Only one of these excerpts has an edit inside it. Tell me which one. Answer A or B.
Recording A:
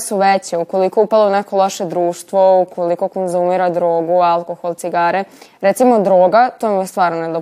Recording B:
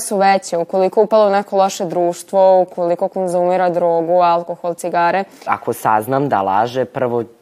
B